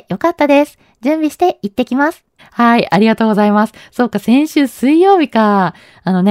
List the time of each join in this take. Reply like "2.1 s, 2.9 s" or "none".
2.4 s